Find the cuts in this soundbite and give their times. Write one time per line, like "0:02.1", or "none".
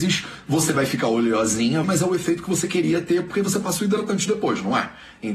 0:01.8